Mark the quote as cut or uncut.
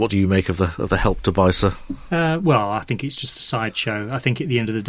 uncut